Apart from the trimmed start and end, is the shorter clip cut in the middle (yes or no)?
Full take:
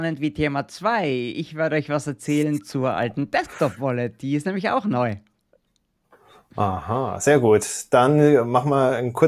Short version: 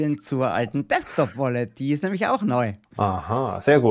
yes